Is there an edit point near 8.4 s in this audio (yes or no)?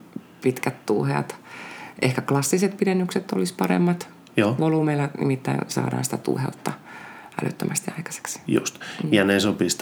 no